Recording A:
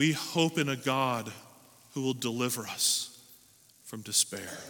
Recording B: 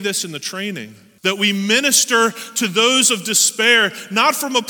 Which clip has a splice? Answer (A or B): B